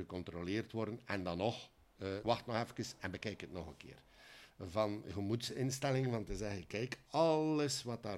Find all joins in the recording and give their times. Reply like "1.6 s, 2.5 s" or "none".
2.2 s, 4.5 s